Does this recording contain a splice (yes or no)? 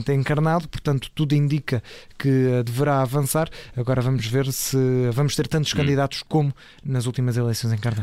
no